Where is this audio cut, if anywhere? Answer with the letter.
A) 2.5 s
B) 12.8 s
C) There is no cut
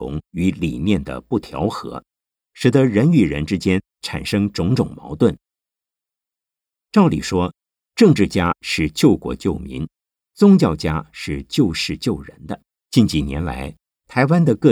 B